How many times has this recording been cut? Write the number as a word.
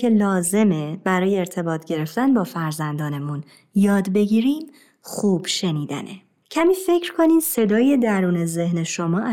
one